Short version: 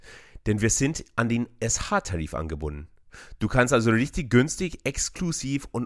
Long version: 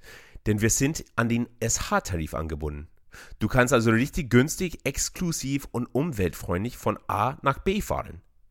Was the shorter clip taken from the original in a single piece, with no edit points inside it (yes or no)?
yes